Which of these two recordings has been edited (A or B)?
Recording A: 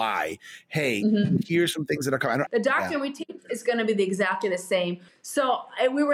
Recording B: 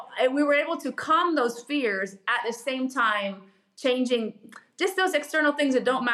A